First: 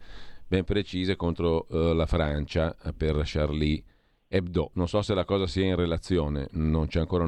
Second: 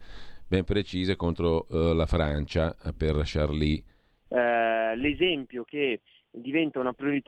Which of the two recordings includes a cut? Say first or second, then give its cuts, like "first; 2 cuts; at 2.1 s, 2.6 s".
second; 1 cut; at 4.3 s